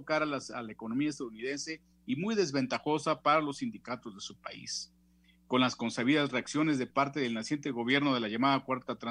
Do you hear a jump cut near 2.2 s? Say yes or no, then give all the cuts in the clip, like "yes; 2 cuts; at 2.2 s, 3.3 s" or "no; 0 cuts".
no; 0 cuts